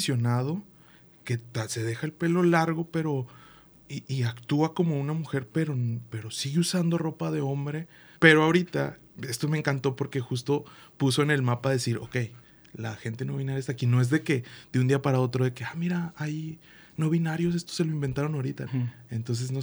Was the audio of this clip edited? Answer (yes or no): yes